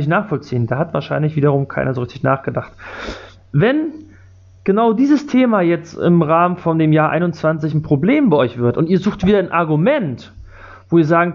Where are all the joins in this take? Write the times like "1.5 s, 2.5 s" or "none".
none